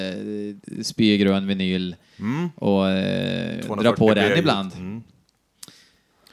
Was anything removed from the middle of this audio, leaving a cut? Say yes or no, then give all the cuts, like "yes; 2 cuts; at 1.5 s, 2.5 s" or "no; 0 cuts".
no; 0 cuts